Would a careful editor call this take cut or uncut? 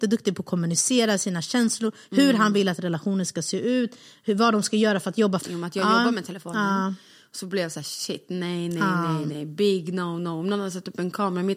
cut